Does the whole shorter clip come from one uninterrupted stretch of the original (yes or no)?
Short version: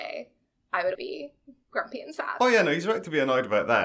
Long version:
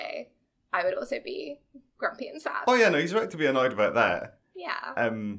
no